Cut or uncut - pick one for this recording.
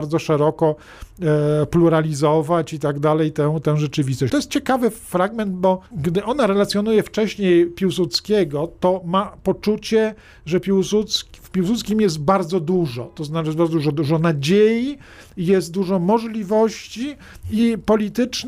cut